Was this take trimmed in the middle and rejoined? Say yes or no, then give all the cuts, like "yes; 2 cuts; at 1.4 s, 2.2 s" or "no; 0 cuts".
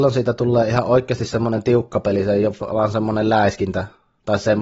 no; 0 cuts